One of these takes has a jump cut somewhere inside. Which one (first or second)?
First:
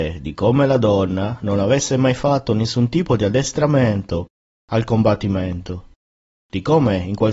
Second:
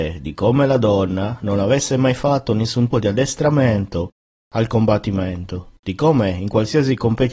second